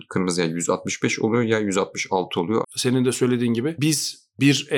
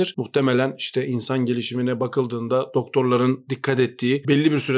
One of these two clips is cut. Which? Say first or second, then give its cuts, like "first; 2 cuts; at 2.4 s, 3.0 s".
first; 1 cut; at 2.6 s